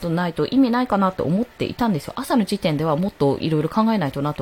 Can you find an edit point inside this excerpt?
no; 0 cuts

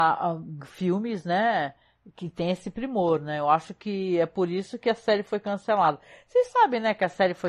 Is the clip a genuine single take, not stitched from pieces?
yes; 0 cuts

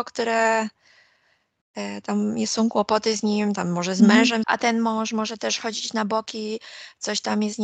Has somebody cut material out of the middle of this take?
yes; 1 cut; at 4.4 s

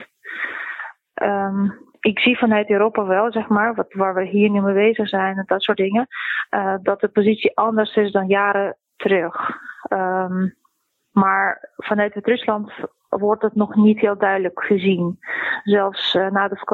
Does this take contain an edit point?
no; 0 cuts

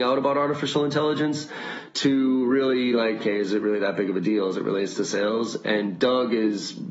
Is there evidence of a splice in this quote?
yes; 1 cut; at 3.2 s

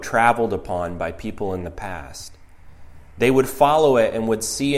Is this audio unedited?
yes; 0 cuts

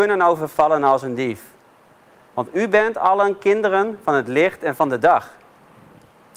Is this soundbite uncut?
yes; 0 cuts

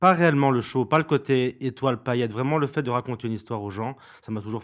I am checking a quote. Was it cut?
no; 0 cuts

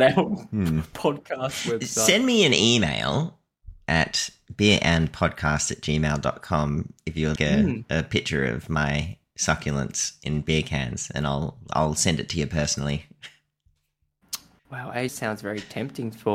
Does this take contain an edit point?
yes; 2 cuts; at 7.4 s, 15.1 s

